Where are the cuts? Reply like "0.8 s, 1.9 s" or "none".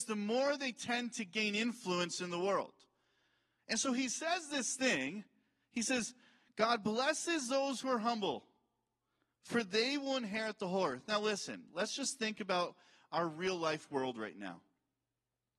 3.6 s